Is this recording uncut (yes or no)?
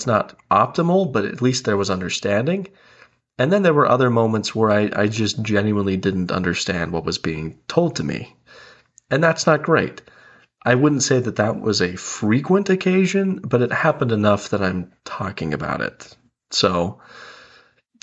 yes